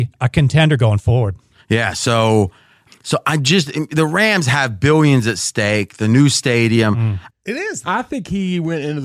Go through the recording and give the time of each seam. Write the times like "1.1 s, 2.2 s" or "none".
2.9 s, 7.3 s

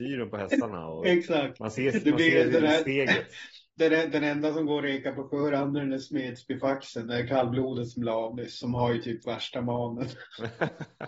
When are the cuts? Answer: none

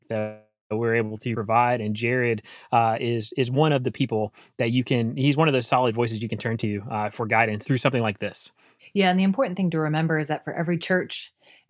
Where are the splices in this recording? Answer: none

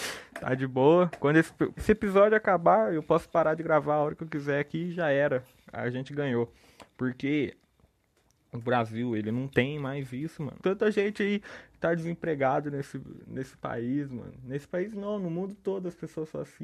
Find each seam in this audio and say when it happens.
1.8 s, 10.6 s

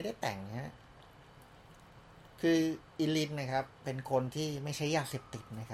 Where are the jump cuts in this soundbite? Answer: none

